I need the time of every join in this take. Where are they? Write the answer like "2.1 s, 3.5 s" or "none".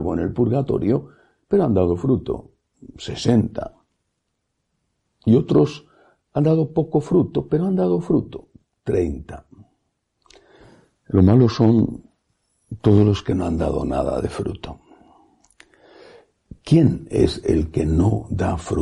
none